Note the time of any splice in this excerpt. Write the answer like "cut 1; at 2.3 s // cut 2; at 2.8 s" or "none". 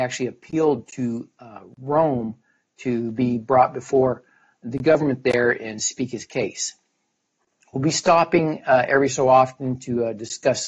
cut 1; at 7.6 s